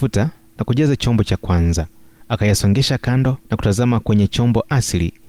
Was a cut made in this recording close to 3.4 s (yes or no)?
yes